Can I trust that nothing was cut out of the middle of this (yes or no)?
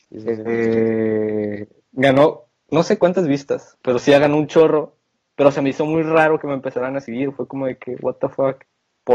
yes